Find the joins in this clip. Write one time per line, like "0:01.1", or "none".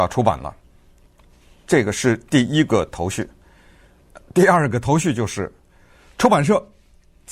none